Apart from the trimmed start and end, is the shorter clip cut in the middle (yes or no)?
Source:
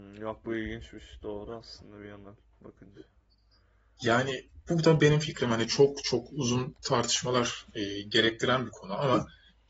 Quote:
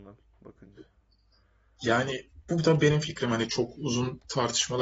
yes